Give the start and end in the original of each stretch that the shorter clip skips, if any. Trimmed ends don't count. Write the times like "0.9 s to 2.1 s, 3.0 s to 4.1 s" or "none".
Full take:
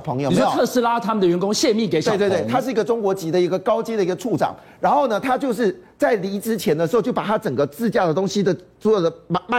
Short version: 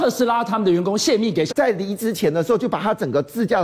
2.0 s to 5.9 s